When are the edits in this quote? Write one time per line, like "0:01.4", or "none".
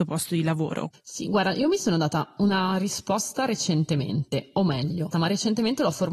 0:00.9
0:05.1